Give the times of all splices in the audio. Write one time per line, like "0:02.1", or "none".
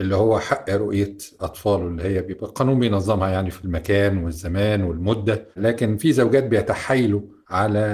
0:05.5